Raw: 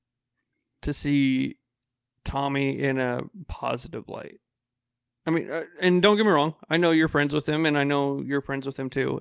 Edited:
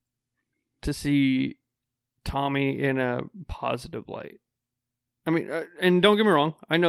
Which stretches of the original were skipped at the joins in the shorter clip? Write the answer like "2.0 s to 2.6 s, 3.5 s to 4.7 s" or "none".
none